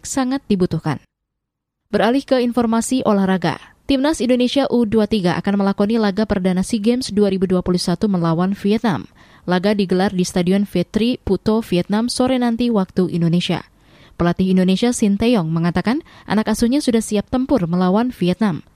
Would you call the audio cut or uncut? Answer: uncut